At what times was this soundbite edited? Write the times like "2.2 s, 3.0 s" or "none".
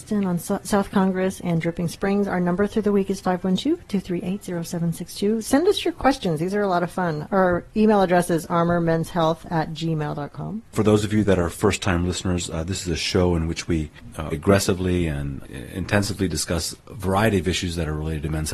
14.3 s, 16.8 s